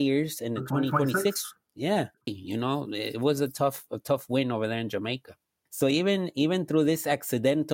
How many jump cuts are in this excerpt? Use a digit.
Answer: 2